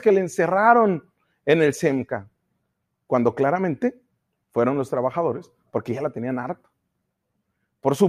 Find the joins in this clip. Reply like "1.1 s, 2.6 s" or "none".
none